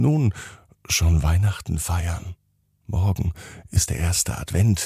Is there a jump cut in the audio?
yes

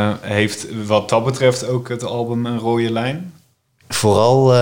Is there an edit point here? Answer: yes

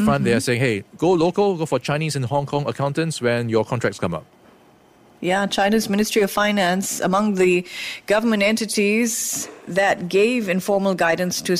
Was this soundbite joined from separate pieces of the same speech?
no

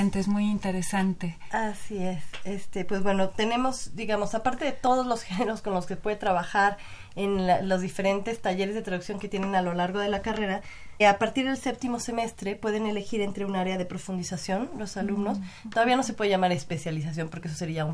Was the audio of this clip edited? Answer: yes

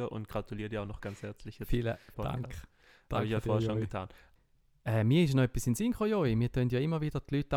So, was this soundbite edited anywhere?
yes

